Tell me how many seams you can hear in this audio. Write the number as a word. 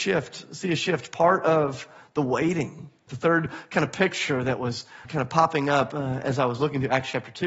two